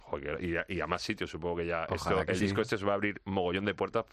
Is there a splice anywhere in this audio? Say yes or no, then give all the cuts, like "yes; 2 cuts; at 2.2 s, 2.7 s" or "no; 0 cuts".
no; 0 cuts